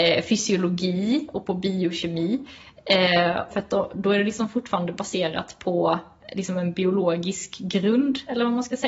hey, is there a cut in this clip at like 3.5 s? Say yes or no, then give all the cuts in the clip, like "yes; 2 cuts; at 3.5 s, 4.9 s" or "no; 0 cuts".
yes; 1 cut; at 3.5 s